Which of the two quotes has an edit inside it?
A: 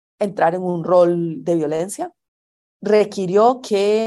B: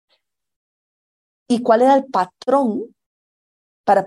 A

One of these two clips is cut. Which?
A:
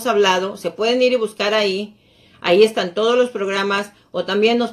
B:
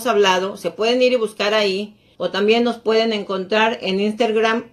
B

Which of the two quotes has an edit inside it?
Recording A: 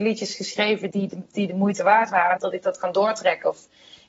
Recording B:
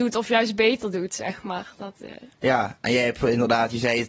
A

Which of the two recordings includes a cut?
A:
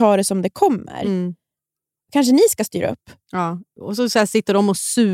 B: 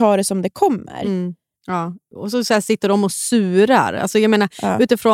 B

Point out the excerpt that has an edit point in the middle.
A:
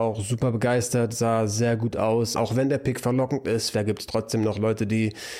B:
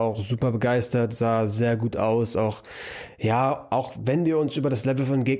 A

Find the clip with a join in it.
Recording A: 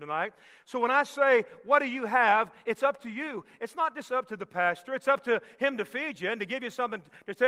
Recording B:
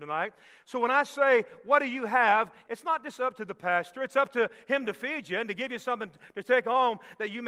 B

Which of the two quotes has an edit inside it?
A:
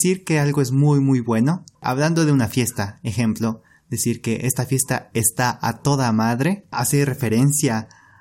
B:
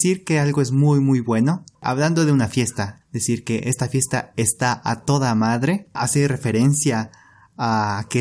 B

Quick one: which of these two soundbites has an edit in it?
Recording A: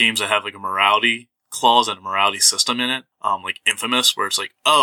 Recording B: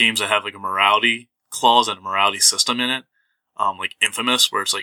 A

